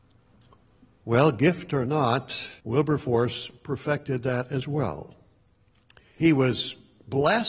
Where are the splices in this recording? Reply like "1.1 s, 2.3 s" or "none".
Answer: 1.0 s, 2.6 s